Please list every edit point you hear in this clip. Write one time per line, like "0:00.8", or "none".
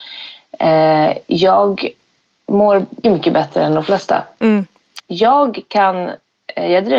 0:03.0
0:05.0